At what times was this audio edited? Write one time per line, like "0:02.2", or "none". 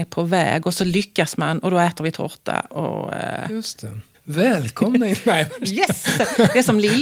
0:04.1